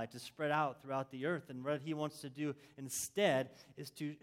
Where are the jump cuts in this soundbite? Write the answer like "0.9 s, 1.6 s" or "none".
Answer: none